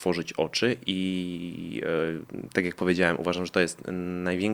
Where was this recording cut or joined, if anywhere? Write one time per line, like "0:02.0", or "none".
none